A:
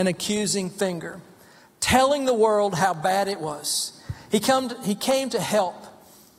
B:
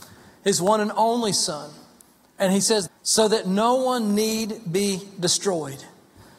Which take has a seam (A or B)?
B